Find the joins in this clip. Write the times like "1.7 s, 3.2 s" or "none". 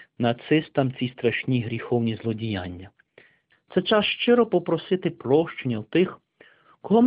3.5 s